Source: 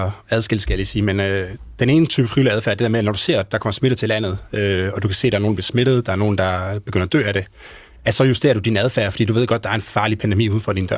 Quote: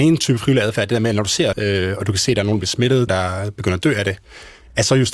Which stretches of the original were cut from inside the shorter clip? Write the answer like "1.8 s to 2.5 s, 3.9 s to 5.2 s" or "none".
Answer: 3.4 s to 4.5 s, 6.0 s to 6.4 s